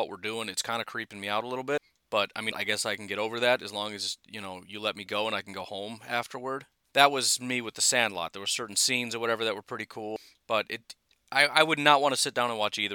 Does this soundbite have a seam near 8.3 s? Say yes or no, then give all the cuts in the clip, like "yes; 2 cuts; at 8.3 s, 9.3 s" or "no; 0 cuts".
no; 2 cuts; at 2.5 s, 6.8 s